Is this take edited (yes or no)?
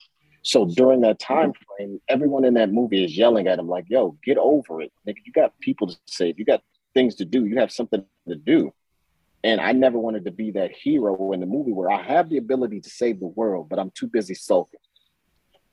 no